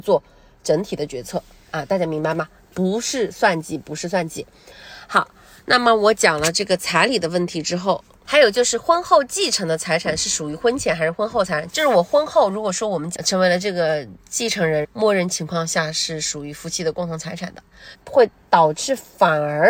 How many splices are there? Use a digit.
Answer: 3